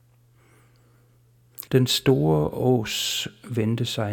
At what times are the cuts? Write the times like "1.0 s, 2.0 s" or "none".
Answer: 1.7 s